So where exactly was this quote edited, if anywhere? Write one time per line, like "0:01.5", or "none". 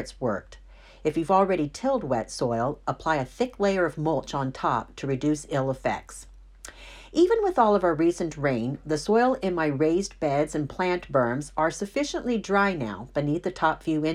none